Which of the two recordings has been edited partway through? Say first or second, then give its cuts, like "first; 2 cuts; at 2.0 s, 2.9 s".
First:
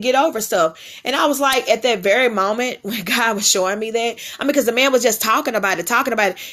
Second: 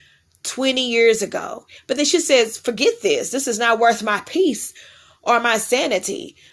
second; 1 cut; at 1.8 s